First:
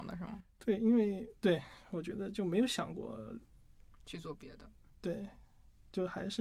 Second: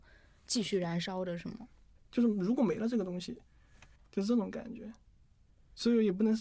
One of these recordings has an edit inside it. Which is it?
second; 2 cuts; at 2.0 s, 4.0 s

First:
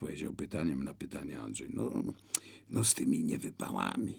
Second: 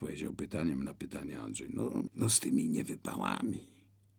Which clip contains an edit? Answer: second; 1 cut; at 2.1 s

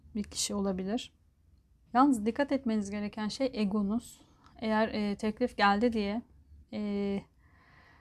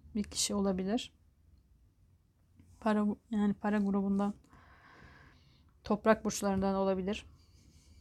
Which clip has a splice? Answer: first; 2 cuts; at 1.9 s, 6.6 s

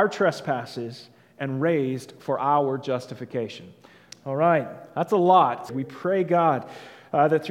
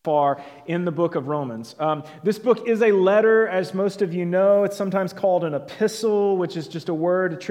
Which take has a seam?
first; 2 cuts; at 4.1 s, 5.7 s

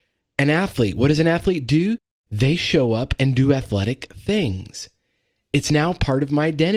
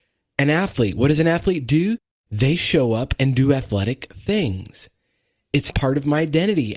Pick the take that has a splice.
second; 1 cut; at 5.7 s

